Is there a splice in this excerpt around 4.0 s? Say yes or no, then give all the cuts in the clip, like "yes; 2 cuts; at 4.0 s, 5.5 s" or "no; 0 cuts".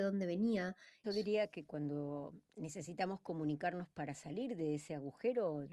no; 2 cuts; at 1.0 s, 2.5 s